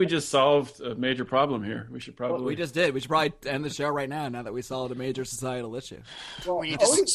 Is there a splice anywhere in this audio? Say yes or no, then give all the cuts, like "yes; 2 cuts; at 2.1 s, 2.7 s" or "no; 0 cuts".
no; 0 cuts